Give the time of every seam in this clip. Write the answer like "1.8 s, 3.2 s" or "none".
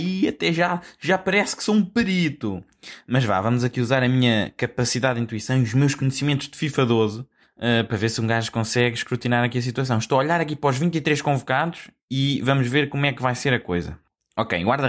none

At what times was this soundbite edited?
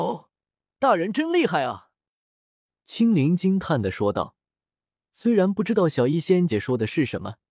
6.5 s

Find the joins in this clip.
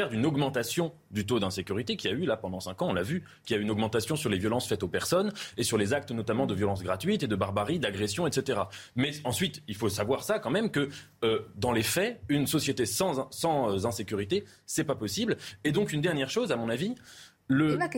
none

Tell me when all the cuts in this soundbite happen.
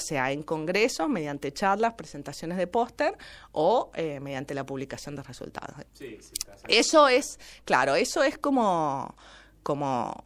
5.8 s

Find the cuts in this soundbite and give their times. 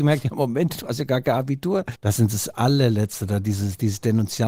1.9 s

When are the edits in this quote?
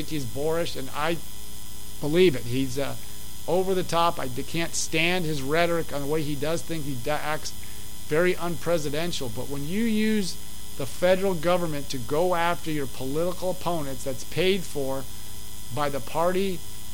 none

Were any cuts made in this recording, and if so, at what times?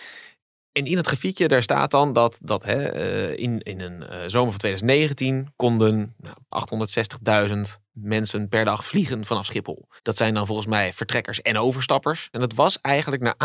6.5 s, 10.0 s, 12.3 s

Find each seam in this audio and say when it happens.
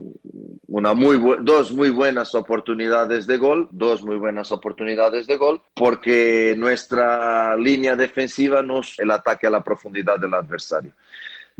5.7 s, 9.0 s

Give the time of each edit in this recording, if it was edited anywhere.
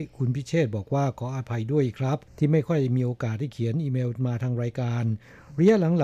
2.3 s

